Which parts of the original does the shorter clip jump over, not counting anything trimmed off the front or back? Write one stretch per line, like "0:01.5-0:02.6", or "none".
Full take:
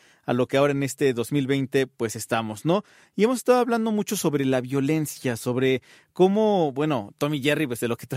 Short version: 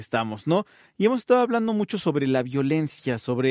none